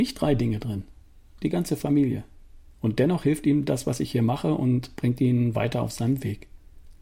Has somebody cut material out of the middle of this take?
yes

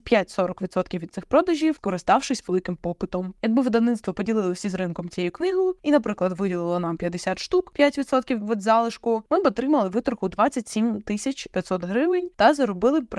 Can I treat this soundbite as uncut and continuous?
no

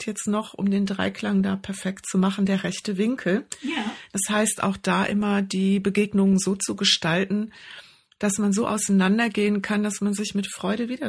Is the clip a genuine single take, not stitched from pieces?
yes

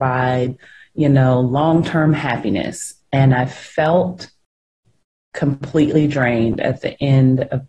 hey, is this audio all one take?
yes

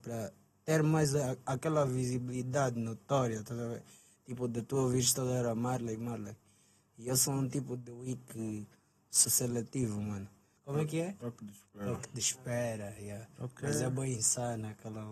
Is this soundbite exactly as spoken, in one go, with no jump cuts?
no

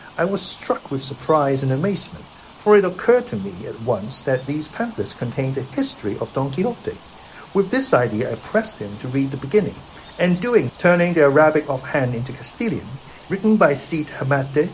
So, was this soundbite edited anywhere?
yes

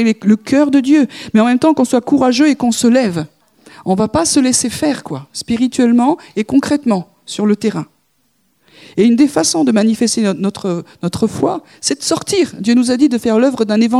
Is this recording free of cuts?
yes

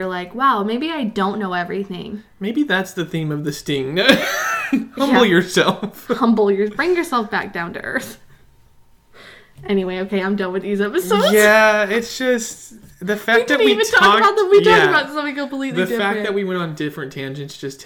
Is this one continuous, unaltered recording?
yes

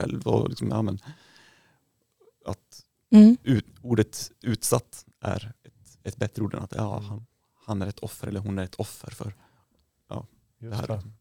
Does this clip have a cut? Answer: no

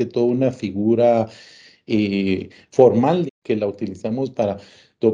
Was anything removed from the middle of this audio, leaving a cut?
yes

